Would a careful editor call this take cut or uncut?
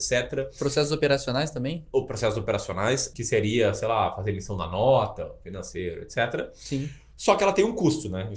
cut